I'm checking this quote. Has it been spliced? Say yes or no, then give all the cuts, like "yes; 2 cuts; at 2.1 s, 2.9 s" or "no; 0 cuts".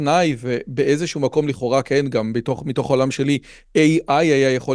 no; 0 cuts